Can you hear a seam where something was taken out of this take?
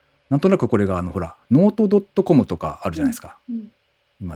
no; 0 cuts

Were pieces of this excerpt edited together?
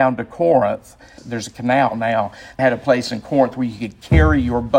yes; 2 cuts; at 1.2 s, 2.6 s

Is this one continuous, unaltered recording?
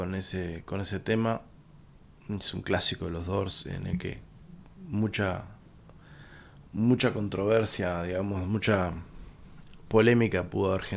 yes; 0 cuts

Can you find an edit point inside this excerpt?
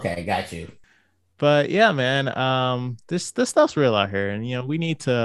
no; 0 cuts

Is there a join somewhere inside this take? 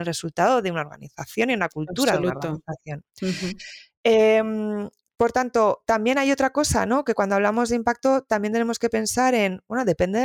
no; 0 cuts

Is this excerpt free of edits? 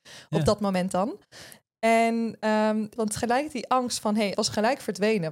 no; 2 cuts; at 3.0 s, 4.3 s

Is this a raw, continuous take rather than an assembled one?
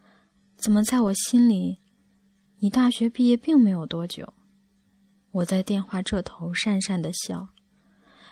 yes; 0 cuts

